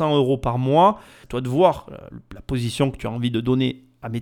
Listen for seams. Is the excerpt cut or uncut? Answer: cut